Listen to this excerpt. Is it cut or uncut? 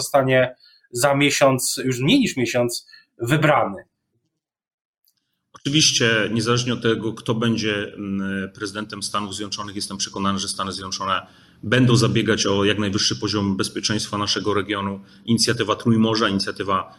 uncut